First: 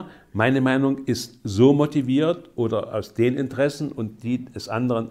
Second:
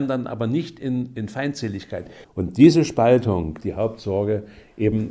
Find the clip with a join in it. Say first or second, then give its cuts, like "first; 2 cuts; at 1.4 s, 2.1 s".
second; 2 cuts; at 2.2 s, 3.6 s